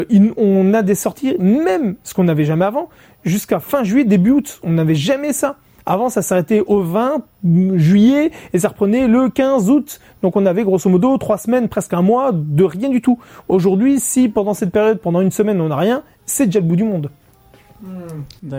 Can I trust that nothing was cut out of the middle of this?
yes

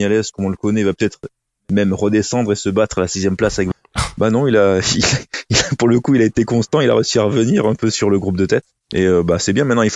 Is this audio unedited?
no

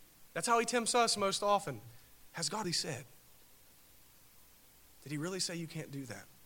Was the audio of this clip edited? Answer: yes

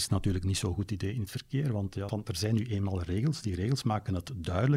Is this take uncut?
no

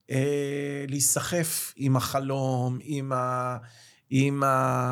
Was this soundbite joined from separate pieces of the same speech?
no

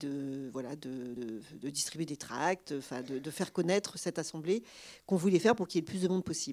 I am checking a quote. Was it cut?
yes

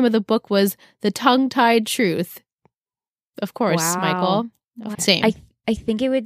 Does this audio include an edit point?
yes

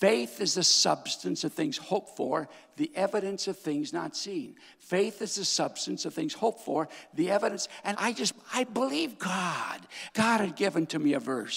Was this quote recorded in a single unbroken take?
no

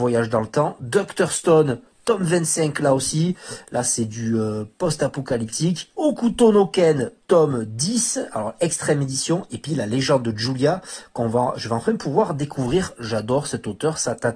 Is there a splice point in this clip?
yes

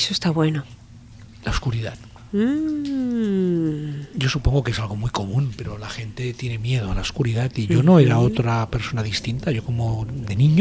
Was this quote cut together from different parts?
yes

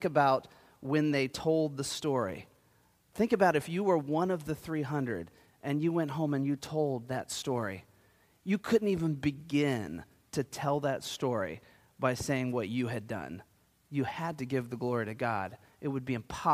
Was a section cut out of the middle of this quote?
no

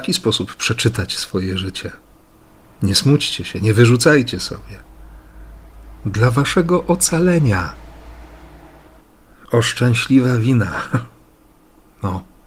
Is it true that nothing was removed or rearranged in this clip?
yes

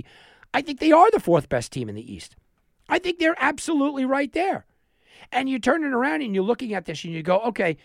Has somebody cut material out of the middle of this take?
no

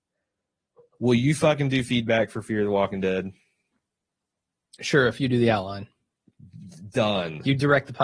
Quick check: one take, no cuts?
yes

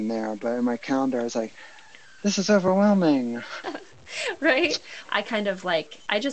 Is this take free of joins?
no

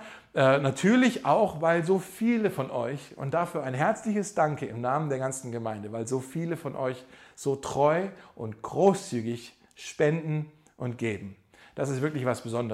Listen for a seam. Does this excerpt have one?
no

